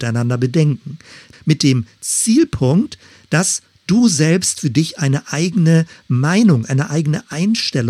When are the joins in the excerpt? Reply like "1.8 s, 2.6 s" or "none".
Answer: 1.3 s